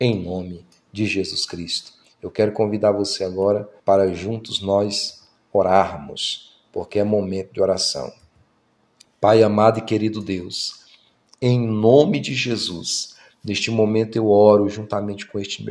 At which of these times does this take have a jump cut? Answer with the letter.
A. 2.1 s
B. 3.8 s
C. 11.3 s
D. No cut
B